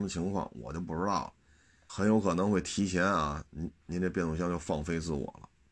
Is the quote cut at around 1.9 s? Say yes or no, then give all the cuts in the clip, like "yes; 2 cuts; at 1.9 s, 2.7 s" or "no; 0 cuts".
yes; 2 cuts; at 1.9 s, 3.8 s